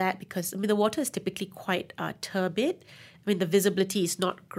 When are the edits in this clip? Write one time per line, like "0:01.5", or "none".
none